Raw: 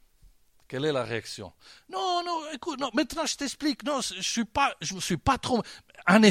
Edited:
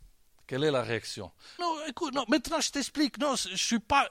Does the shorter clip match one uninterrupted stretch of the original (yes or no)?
no